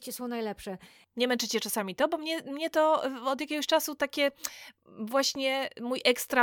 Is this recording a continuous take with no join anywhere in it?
yes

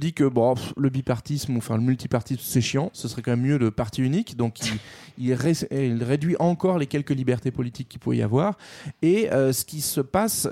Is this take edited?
no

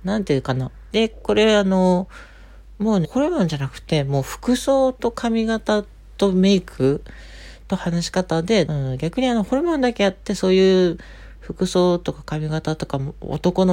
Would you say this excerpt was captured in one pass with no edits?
no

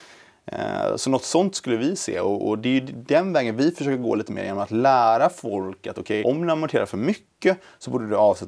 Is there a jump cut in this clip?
yes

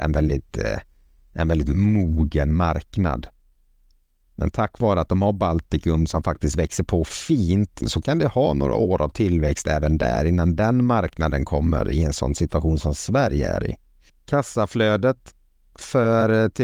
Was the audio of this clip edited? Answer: yes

